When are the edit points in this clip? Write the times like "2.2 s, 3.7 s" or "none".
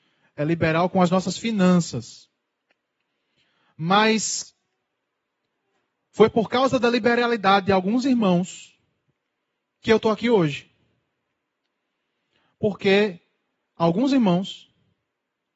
none